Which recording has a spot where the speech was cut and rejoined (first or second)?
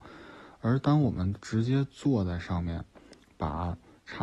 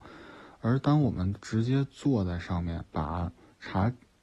second